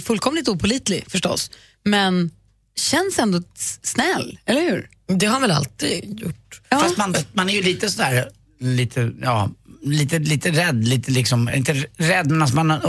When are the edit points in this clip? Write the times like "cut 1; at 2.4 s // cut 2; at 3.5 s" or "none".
none